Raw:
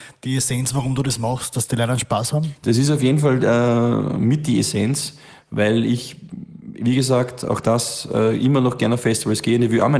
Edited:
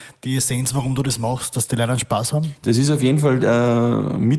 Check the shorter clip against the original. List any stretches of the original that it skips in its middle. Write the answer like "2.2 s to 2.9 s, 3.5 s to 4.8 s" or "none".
none